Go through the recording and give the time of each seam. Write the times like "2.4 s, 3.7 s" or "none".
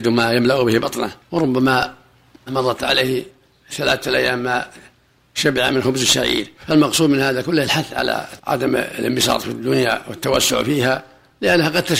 1.2 s, 6.6 s, 8.4 s

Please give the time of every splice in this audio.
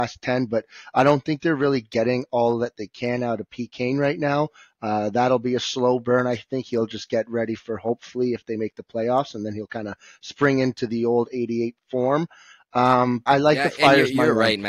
13.3 s

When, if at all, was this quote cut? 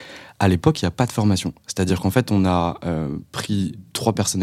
none

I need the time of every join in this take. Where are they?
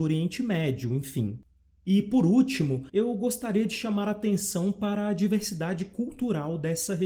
1.7 s, 2.9 s

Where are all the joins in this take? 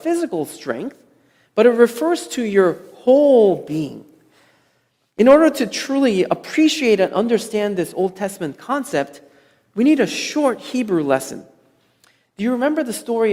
none

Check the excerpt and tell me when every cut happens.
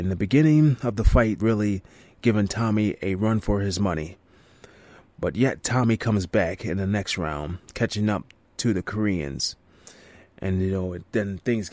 1.4 s

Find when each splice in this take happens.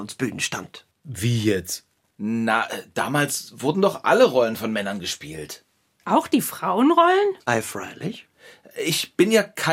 none

